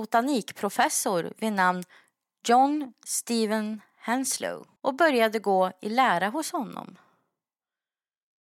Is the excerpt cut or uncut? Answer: cut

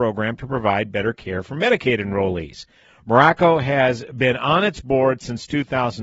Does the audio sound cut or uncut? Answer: uncut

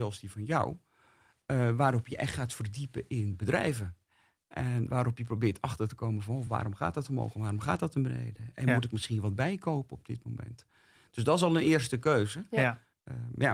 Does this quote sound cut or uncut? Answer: uncut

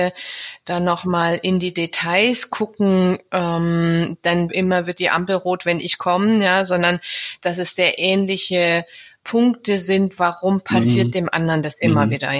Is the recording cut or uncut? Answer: cut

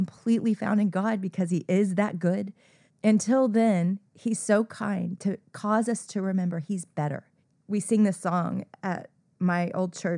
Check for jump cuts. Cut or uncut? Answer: uncut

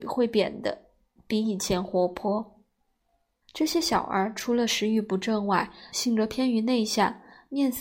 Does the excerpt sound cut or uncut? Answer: cut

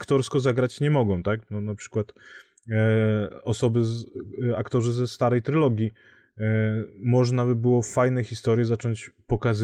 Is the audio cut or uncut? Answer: uncut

